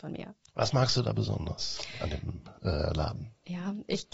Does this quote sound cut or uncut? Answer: uncut